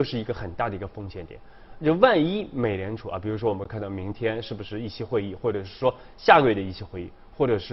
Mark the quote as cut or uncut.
uncut